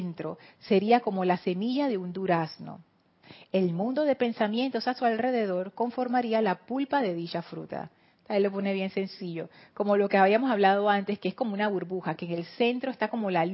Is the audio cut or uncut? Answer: uncut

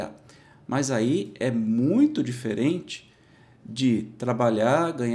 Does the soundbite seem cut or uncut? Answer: uncut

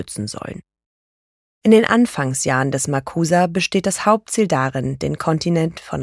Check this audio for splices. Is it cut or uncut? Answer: uncut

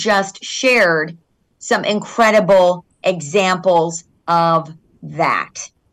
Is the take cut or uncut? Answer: uncut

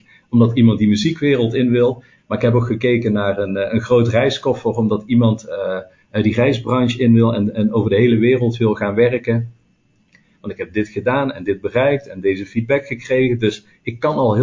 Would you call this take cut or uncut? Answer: cut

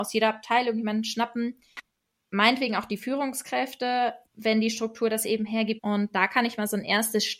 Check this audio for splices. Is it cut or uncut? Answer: cut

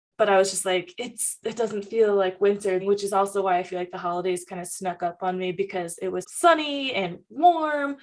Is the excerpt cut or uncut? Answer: cut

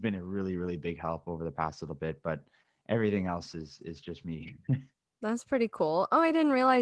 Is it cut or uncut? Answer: uncut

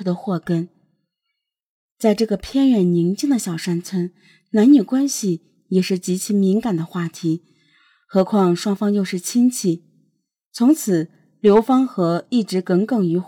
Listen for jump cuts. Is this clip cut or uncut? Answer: uncut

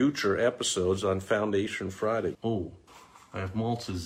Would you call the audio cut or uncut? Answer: cut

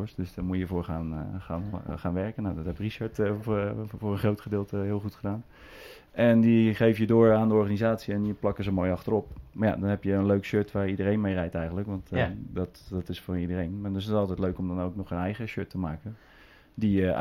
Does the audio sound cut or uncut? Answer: uncut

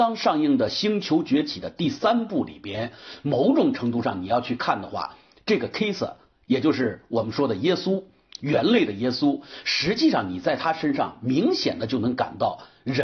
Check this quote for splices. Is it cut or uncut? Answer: uncut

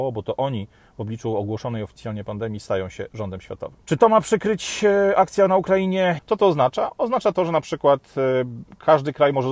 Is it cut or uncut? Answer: cut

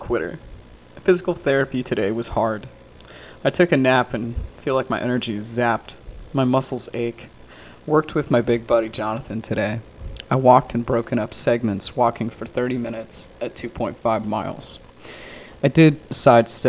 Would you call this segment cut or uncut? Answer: uncut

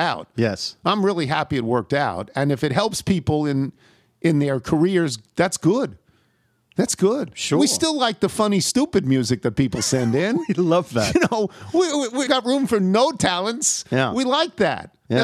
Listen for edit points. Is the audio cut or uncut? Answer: cut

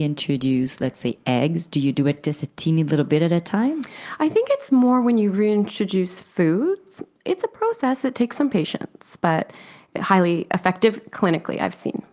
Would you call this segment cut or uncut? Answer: cut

